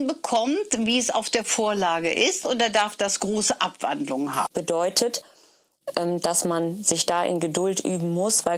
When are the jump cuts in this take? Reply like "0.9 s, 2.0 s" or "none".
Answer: 4.5 s